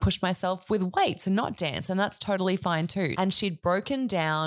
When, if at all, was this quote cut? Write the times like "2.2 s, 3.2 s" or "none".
3.1 s